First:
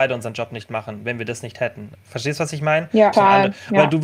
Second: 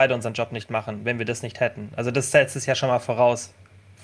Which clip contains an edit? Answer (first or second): first